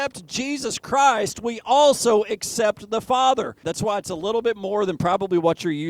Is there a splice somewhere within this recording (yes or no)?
yes